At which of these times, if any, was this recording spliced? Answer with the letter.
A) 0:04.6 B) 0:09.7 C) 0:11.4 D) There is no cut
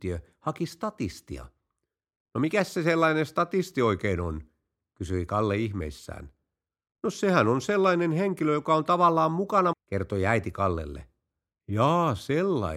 B